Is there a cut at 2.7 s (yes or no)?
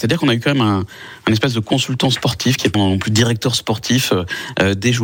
yes